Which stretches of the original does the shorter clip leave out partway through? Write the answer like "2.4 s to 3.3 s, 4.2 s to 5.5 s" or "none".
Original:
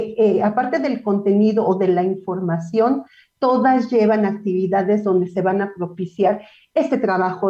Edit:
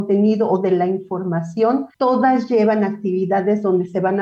3.1 s to 3.4 s